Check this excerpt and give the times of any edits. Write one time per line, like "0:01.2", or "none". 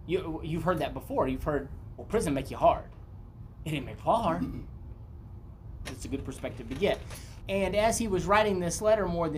0:05.9
0:07.4